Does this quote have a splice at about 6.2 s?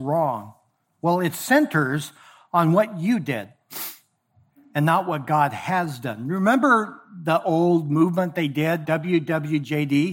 no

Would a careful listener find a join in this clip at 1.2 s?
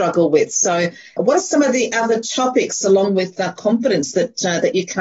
yes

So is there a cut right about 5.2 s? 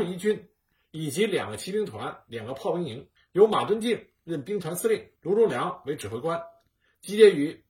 yes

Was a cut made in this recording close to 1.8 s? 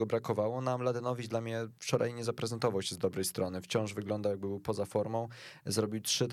yes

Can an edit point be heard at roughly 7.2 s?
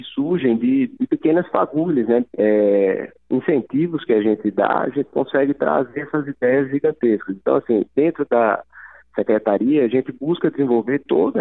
no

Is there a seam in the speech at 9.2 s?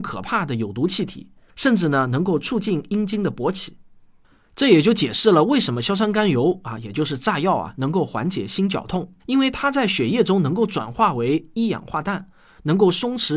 yes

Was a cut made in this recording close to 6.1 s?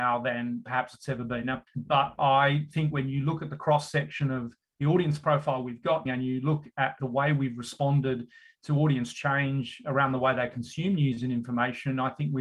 yes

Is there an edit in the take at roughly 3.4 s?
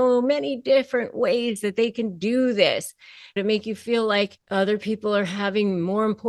yes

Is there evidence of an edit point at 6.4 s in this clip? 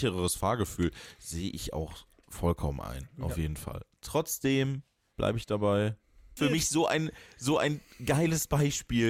yes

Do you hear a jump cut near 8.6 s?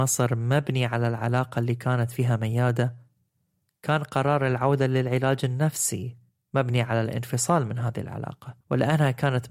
yes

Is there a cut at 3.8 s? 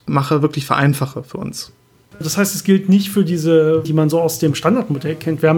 yes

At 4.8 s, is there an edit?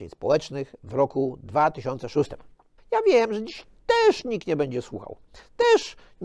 no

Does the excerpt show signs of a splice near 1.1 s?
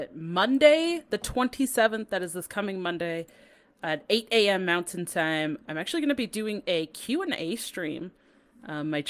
no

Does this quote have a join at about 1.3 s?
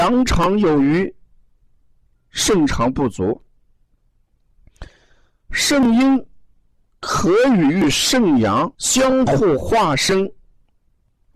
no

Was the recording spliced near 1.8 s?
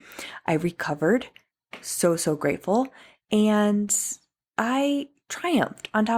no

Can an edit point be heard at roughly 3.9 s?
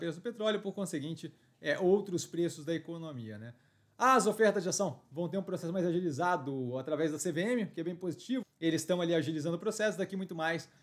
no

